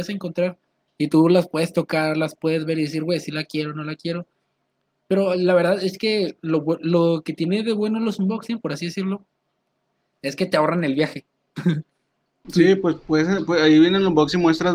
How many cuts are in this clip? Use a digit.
0